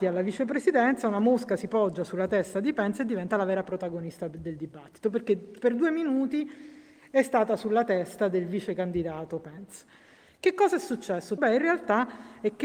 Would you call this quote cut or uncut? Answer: cut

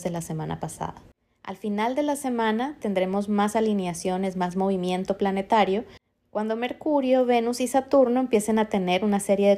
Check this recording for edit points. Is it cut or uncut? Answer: uncut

